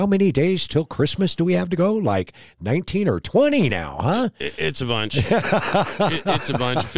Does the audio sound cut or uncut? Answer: uncut